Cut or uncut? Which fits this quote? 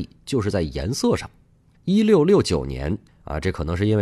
cut